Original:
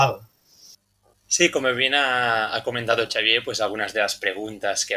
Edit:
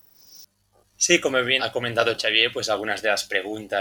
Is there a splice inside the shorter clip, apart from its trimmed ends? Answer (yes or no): yes